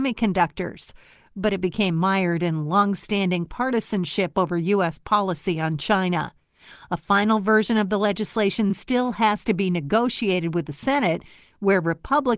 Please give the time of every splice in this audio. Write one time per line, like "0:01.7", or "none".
none